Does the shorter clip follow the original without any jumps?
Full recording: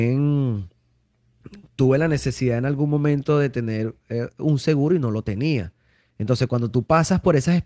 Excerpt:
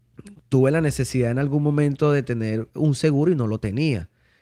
no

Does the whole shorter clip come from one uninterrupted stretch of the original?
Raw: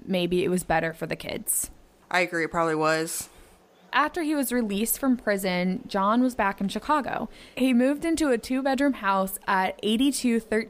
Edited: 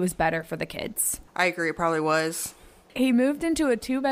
no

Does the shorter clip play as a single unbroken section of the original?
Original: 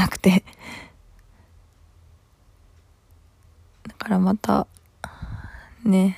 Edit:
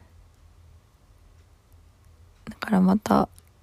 yes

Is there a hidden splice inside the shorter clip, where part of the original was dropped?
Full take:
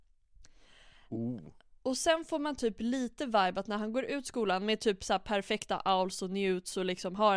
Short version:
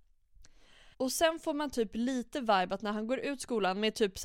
yes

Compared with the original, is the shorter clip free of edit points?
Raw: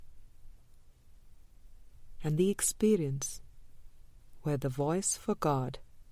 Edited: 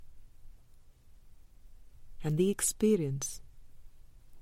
yes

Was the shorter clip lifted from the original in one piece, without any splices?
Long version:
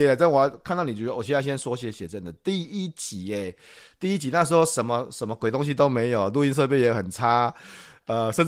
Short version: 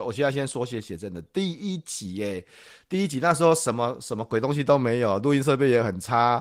yes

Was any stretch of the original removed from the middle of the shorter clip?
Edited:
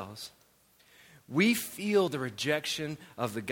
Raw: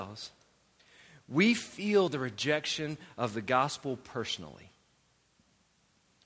no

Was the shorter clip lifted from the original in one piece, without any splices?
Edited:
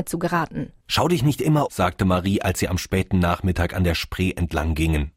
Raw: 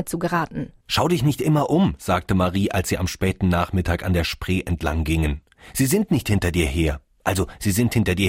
no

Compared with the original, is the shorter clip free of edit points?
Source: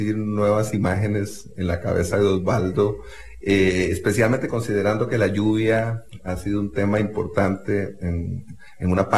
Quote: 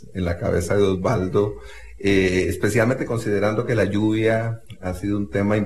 yes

